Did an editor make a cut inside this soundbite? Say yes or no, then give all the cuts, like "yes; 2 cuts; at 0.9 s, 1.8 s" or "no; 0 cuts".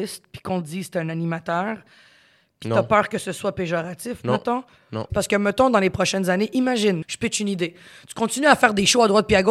yes; 2 cuts; at 5.1 s, 7.0 s